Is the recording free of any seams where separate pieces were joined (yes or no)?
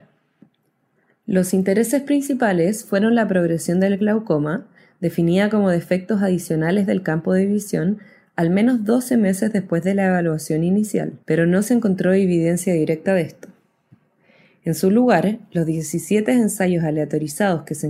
no